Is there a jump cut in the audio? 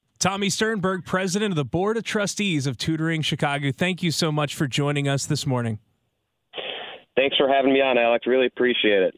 no; 0 cuts

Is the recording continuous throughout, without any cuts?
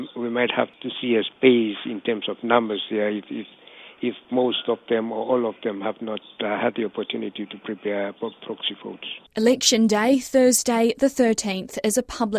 no; 1 cut; at 9.3 s

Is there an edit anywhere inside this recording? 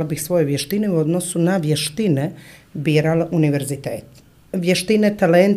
no; 0 cuts

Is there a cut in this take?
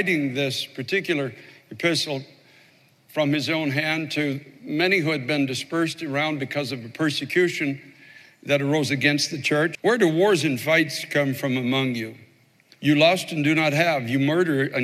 yes; 2 cuts; at 9.7 s, 12.7 s

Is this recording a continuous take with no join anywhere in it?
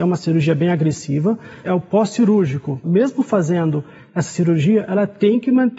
no; 2 cuts; at 1.6 s, 2.8 s

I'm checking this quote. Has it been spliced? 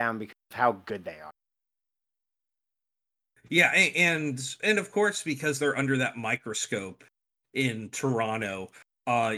no; 0 cuts

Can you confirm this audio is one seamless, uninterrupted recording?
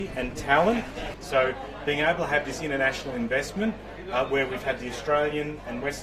no; 1 cut; at 1.2 s

